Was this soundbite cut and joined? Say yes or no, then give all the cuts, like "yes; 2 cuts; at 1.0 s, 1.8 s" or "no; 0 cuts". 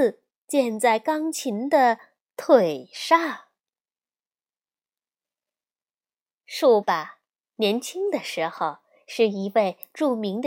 yes; 1 cut; at 6.8 s